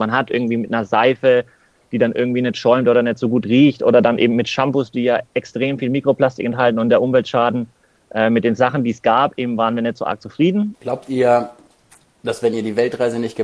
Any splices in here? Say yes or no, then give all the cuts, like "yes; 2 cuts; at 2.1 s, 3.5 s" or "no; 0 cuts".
yes; 1 cut; at 10.7 s